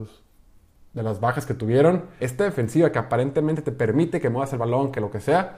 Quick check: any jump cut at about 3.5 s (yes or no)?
no